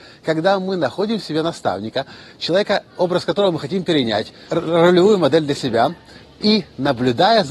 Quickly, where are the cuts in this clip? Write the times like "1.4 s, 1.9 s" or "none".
4.5 s